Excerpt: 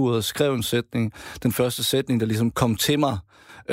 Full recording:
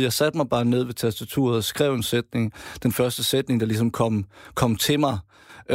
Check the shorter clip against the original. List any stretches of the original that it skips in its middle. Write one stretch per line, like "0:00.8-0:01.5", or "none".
0:03.9-0:04.5